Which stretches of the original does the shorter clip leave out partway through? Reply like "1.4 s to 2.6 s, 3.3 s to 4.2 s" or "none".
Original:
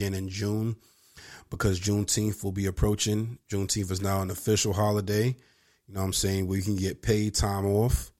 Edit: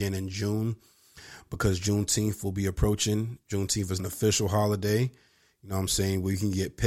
4.0 s to 4.2 s